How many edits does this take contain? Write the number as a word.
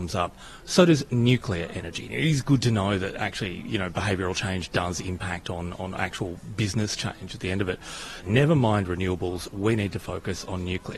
two